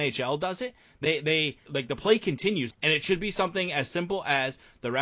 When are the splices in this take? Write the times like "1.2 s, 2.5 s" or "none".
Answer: 1.7 s, 2.7 s